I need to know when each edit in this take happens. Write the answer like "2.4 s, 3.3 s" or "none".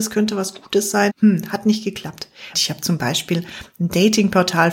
1.1 s, 2.5 s